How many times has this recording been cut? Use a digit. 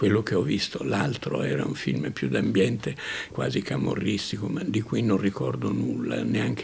1